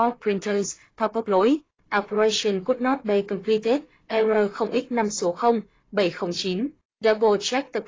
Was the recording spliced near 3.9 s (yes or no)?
no